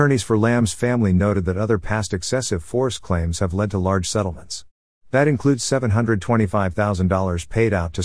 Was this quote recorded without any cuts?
yes; 0 cuts

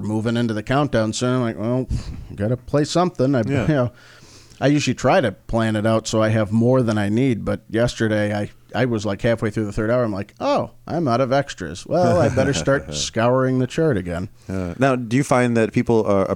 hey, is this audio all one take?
yes; 0 cuts

